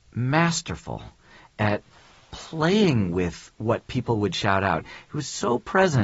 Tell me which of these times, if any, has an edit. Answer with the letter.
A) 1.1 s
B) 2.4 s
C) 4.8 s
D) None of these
C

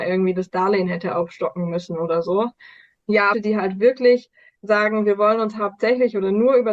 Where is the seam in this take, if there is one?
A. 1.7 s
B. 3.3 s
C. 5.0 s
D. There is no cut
B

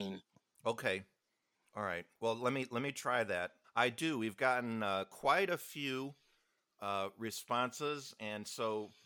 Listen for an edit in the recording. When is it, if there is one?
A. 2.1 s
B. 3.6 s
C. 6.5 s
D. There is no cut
B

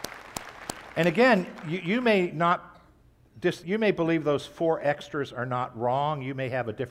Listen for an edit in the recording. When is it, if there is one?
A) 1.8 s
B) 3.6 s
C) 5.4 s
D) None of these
B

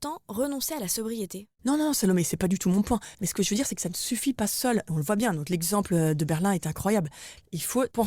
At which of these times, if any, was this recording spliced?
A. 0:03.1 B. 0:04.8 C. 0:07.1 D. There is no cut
A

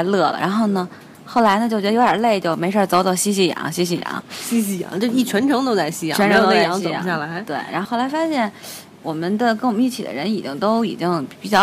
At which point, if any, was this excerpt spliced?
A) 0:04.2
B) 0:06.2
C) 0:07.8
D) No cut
C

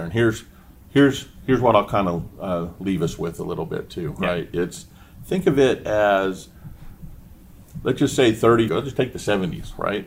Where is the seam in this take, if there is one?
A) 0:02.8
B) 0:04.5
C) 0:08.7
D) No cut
C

